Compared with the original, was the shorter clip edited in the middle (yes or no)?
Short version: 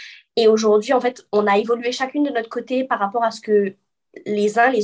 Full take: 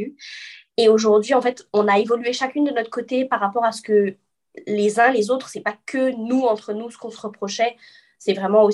no